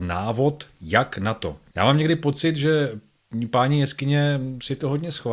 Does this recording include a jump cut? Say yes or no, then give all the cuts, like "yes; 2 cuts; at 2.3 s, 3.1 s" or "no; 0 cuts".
yes; 1 cut; at 1.7 s